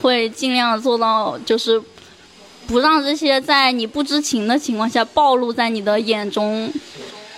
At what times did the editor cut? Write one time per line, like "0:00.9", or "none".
none